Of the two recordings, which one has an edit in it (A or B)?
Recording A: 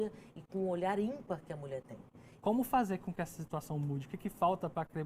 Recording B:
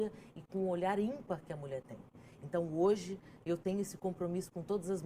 A